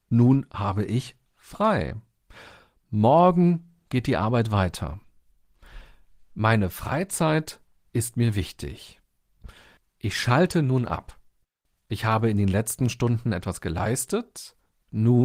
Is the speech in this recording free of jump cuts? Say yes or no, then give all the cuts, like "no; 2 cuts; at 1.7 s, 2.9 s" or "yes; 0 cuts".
yes; 0 cuts